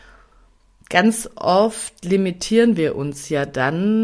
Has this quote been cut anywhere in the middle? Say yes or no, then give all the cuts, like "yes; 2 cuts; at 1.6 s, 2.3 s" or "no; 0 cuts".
no; 0 cuts